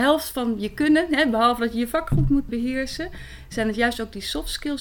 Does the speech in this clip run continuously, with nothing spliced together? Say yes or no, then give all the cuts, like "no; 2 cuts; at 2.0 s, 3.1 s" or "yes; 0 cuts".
no; 1 cut; at 2.5 s